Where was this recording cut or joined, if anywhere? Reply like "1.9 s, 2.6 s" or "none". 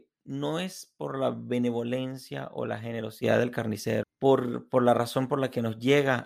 4.0 s

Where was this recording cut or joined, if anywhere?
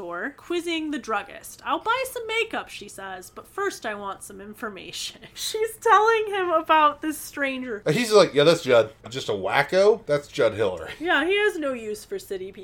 9.0 s

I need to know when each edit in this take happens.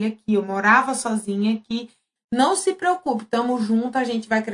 2.2 s

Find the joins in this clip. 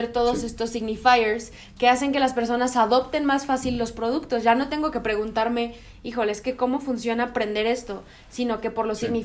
none

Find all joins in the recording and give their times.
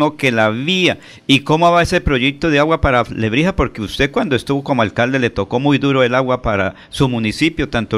none

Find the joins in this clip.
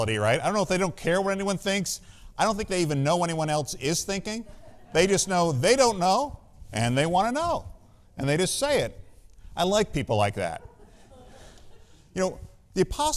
none

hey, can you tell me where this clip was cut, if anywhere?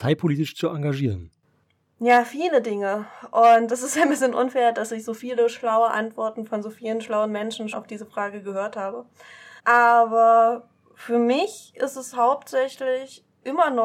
7.7 s, 9.6 s

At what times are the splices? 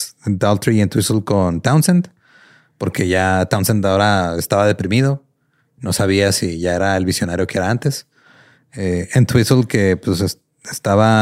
8.6 s

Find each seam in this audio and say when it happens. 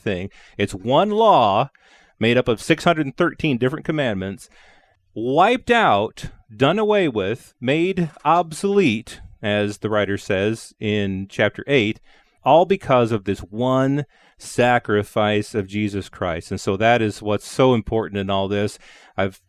none

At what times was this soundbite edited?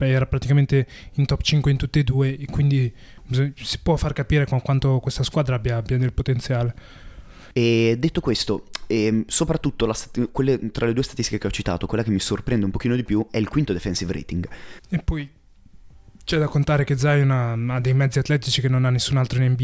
14.8 s

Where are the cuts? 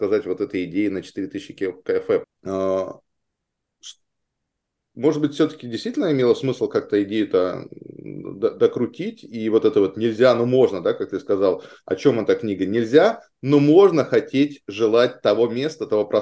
2.2 s

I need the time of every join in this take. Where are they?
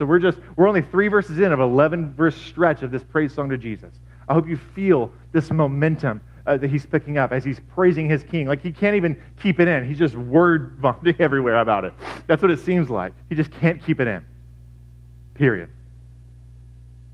13.2 s, 15.3 s

